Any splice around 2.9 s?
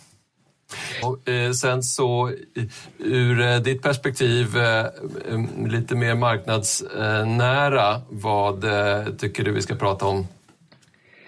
no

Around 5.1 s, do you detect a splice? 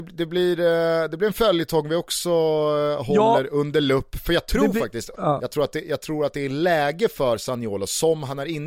yes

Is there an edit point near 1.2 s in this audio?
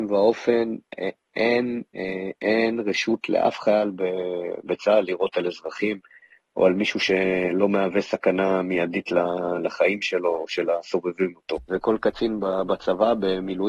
no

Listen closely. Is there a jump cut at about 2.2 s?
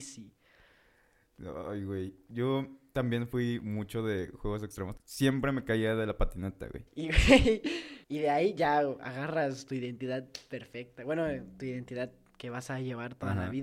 no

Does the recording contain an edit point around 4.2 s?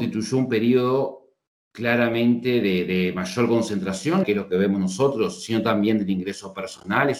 yes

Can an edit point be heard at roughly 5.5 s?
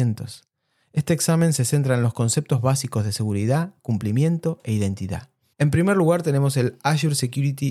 yes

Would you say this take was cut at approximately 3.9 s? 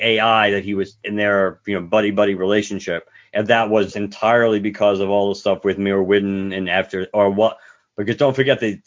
yes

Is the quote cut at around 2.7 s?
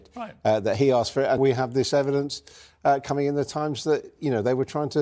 no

